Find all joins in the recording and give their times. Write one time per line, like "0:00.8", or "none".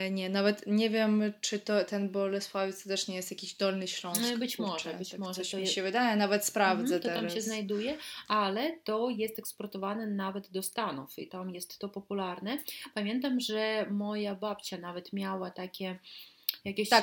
none